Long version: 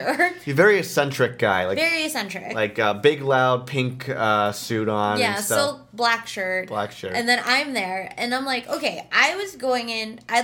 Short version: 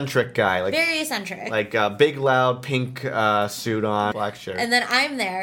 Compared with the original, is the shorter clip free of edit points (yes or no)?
no